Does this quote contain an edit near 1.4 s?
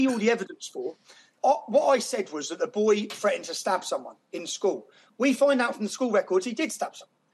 yes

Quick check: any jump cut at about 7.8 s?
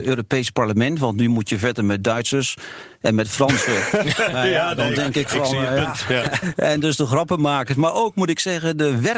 no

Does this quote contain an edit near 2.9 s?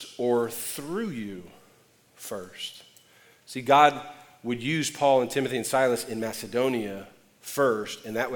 no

